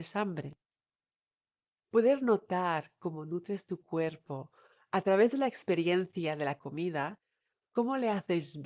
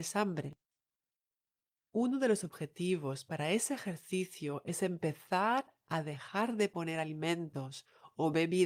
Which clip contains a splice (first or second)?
first